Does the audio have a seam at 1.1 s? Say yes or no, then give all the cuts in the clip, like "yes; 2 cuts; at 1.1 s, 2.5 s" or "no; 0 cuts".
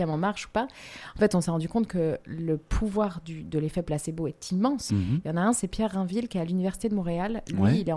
no; 1 cut; at 4.9 s